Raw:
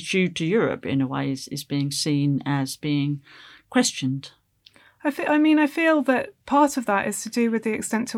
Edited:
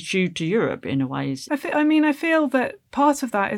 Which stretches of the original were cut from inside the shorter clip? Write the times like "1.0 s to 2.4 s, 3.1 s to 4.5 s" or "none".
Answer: 1.5 s to 5.0 s